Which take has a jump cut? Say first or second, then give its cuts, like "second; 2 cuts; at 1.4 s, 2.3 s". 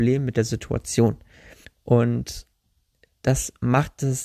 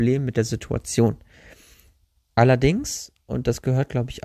first; 1 cut; at 1.6 s